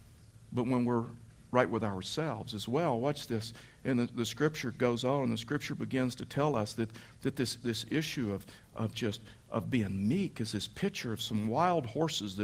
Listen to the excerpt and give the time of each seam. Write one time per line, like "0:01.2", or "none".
none